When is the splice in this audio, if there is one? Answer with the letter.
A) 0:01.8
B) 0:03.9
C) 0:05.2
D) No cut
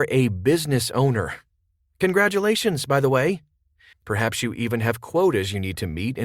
B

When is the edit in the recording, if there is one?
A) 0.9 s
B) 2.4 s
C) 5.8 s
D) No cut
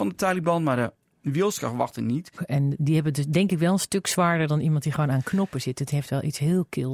B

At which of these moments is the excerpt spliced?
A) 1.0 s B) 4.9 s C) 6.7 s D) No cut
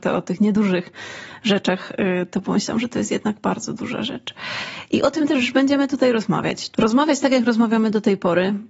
C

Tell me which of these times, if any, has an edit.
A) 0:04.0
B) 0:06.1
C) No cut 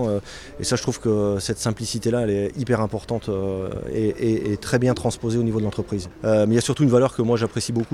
B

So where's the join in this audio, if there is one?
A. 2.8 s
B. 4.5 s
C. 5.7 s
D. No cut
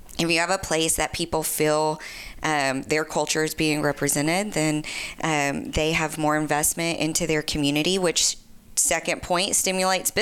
D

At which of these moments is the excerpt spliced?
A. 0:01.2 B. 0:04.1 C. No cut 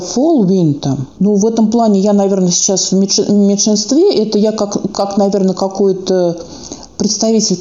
A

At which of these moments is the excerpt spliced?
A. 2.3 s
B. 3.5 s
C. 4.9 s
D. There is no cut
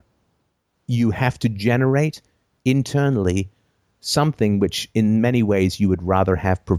D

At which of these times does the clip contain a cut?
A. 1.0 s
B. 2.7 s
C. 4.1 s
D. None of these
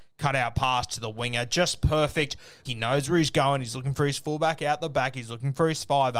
B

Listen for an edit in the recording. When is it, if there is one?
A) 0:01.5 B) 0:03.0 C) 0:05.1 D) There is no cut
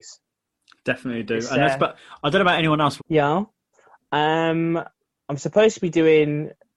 B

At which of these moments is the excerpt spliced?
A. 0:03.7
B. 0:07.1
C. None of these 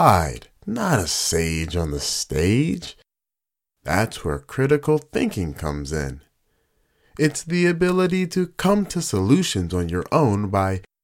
A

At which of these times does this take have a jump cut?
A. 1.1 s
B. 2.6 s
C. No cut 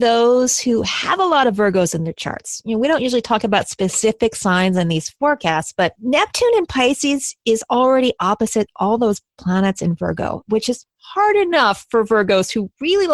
C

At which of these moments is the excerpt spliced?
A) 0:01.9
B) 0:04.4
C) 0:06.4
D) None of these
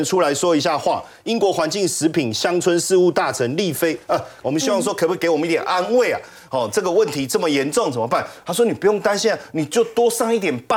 B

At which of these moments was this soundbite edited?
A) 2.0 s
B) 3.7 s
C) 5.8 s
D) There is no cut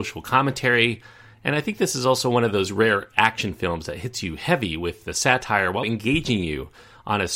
C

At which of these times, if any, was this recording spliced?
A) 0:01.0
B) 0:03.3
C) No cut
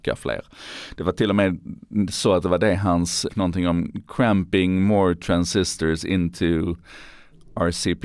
B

